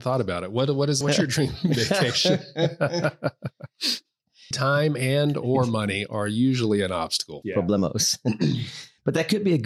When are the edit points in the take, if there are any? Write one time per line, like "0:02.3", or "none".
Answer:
0:01.0
0:04.5
0:07.4